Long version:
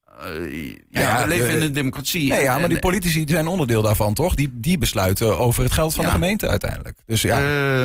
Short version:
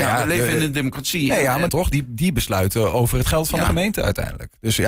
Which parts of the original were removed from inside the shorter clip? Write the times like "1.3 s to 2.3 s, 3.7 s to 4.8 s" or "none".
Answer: 2.7 s to 4.1 s